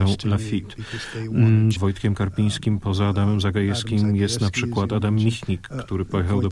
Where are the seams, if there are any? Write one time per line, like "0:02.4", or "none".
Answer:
0:01.8